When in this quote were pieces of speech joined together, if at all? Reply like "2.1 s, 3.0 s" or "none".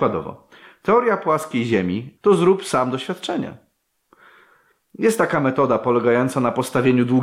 2.2 s